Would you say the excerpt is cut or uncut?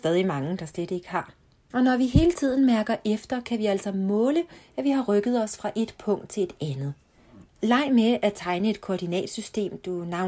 cut